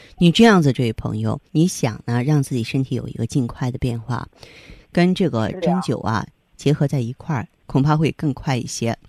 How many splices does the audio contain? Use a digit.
2